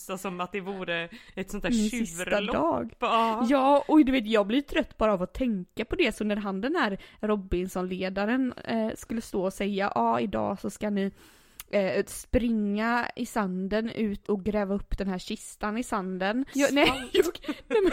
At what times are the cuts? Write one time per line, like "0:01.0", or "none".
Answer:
0:14.2
0:16.5